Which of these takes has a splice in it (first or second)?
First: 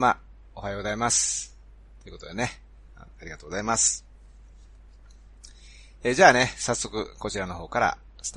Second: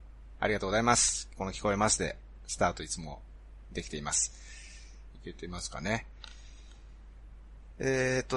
second